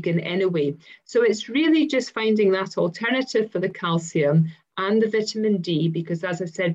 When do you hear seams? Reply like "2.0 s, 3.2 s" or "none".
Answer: none